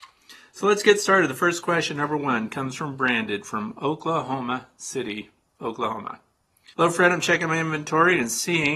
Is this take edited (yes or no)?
yes